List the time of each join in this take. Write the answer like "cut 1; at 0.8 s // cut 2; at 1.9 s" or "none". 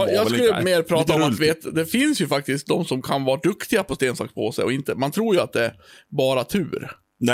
none